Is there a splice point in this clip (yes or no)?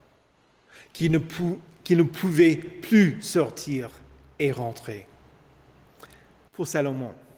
yes